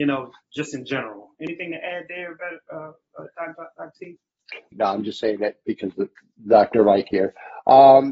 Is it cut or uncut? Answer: cut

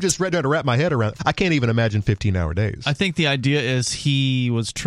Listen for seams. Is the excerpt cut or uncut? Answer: cut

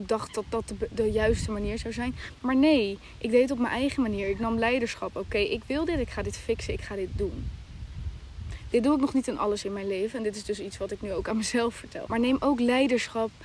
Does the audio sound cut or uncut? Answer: cut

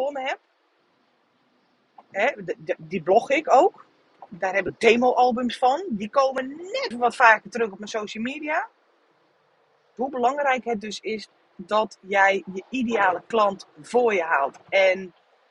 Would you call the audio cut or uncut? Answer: cut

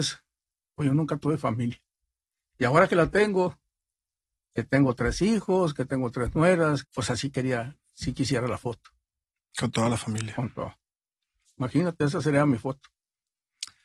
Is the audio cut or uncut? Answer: cut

